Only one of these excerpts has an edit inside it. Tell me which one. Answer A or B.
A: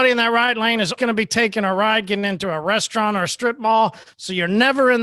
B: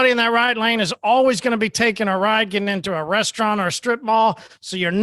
A